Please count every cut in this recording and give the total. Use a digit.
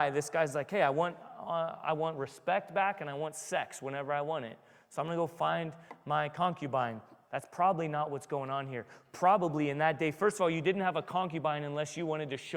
1